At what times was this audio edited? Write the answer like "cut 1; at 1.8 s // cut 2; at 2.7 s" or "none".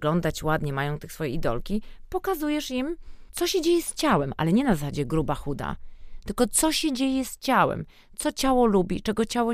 none